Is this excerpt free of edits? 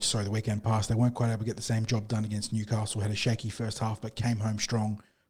yes; 0 cuts

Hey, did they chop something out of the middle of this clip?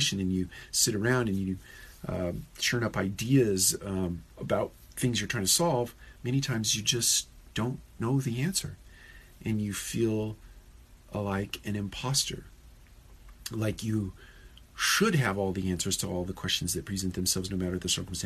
no; 0 cuts

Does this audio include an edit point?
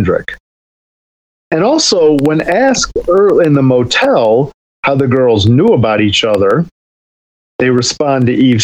no; 0 cuts

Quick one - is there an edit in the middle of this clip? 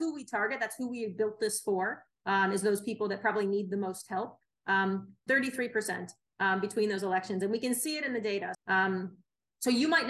yes; 2 cuts; at 5.3 s, 8.5 s

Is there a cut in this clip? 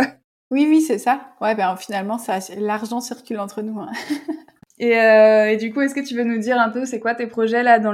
no; 0 cuts

